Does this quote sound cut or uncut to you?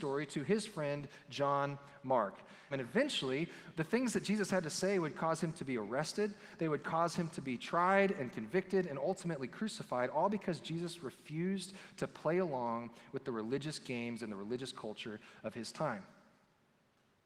cut